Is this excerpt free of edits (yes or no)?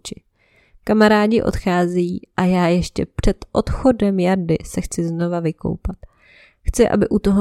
yes